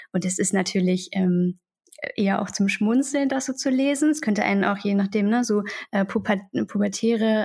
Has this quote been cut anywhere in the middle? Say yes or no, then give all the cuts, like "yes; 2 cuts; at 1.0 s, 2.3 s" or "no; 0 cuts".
no; 0 cuts